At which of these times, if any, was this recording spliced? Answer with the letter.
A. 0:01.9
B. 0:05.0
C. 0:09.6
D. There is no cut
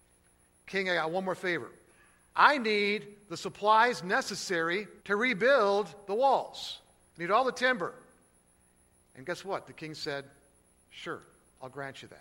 B